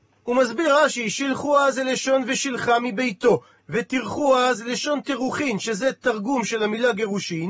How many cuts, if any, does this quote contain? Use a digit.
1